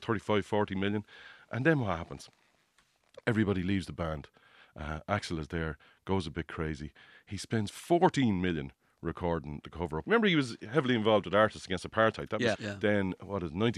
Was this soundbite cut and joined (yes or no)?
yes